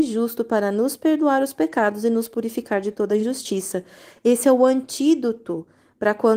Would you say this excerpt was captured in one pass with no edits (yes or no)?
yes